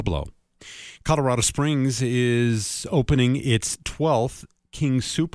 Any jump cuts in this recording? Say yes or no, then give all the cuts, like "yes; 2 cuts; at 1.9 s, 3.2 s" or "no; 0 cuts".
no; 0 cuts